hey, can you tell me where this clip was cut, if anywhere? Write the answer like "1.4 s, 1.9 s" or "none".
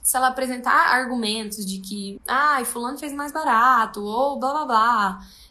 none